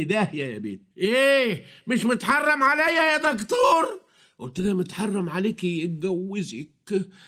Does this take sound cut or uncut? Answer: cut